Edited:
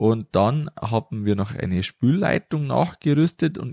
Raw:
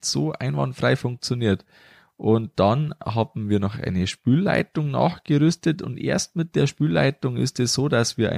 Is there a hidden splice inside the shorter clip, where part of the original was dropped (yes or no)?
no